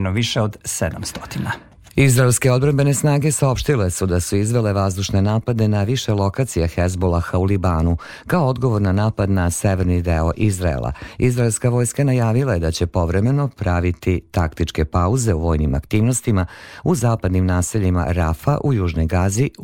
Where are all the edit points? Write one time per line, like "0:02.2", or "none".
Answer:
0:11.2